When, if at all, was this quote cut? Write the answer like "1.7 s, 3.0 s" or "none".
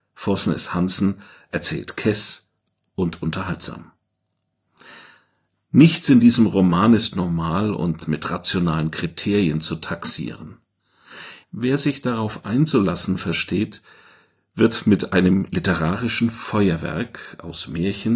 5.5 s, 11.4 s